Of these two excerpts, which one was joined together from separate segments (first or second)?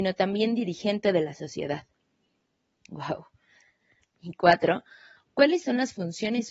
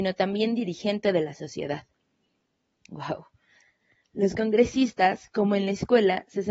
first